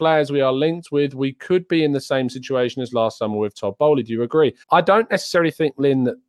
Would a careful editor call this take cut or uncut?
cut